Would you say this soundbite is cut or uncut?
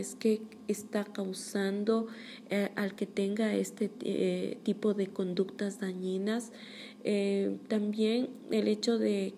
uncut